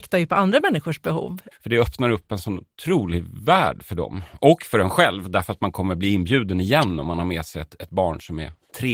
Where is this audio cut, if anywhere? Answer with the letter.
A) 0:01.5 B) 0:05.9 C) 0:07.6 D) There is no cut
A